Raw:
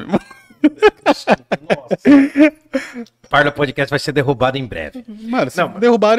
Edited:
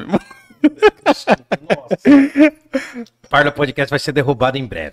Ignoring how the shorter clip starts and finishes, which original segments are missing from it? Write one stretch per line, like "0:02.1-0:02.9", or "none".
none